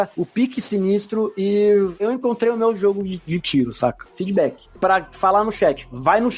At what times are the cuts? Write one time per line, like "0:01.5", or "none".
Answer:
0:04.1